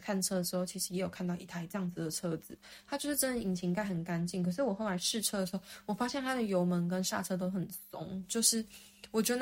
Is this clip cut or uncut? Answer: uncut